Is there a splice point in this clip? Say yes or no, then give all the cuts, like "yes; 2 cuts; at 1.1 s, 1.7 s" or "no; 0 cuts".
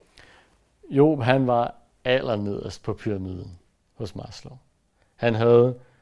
no; 0 cuts